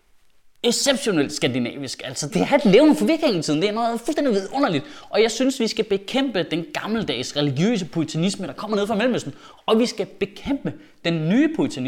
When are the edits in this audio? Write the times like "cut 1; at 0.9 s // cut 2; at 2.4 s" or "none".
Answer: cut 1; at 2.3 s